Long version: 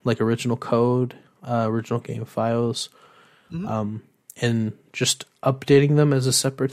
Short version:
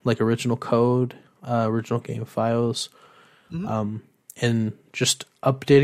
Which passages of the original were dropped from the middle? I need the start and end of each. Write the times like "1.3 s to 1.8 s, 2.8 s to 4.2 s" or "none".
none